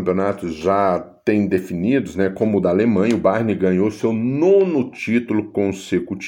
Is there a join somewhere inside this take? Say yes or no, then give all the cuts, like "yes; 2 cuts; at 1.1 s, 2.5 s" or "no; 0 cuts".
no; 0 cuts